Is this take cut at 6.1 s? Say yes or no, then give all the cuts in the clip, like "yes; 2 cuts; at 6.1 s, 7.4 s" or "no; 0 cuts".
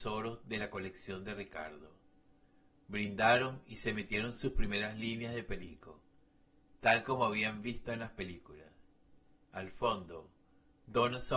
no; 0 cuts